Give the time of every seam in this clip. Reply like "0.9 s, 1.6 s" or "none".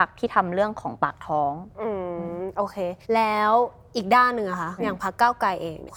3.0 s, 4.8 s